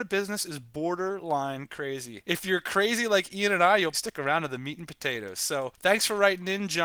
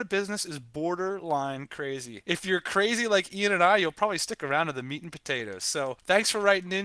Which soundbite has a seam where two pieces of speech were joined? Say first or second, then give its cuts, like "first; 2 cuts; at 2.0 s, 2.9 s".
first; 1 cut; at 3.9 s